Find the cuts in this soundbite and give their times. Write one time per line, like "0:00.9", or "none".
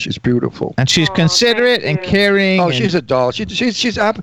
none